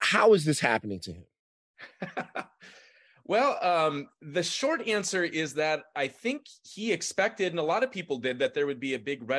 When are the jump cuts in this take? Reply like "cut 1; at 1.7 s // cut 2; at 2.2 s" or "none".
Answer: none